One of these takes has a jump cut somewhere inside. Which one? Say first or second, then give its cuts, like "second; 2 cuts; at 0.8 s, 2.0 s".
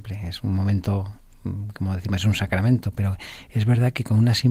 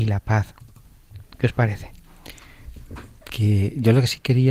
second; 1 cut; at 3.3 s